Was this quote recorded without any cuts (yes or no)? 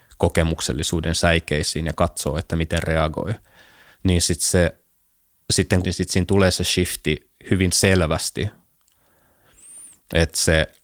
no